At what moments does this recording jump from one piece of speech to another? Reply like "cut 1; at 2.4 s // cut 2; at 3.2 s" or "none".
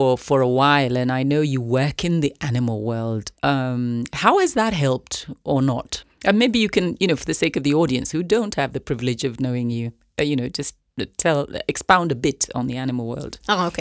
none